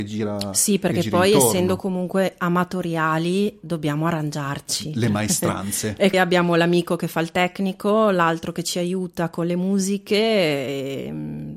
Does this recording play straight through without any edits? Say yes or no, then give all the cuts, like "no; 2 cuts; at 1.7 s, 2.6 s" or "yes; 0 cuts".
no; 1 cut; at 6.1 s